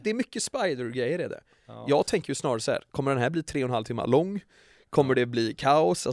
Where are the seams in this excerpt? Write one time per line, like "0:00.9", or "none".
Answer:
none